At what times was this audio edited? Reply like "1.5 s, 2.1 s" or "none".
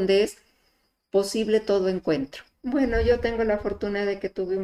2.5 s